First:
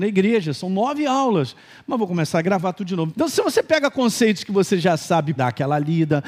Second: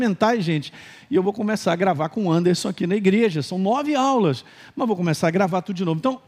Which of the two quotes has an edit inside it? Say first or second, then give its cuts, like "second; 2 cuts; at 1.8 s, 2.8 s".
first; 2 cuts; at 3.1 s, 5.4 s